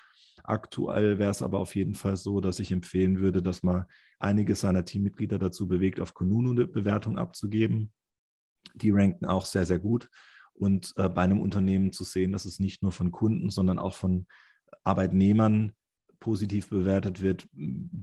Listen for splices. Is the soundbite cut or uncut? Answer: uncut